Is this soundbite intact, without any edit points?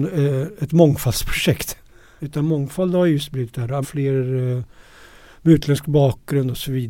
no; 2 cuts; at 2.2 s, 3.8 s

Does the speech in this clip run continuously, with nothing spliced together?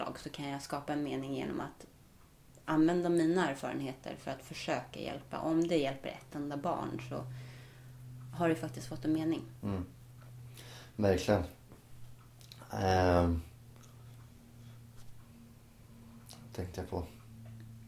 yes; 0 cuts

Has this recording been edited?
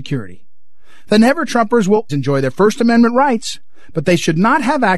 yes; 1 cut; at 2.1 s

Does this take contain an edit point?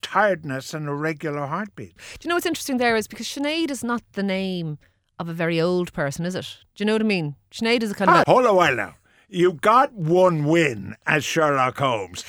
yes; 2 cuts; at 2.0 s, 8.2 s

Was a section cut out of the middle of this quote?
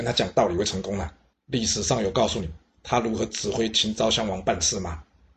yes; 1 cut; at 1.3 s

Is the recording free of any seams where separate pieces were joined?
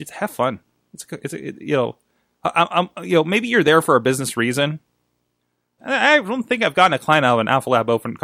no; 1 cut; at 5.8 s

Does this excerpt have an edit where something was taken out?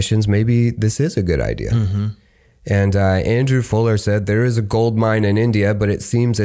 no; 0 cuts

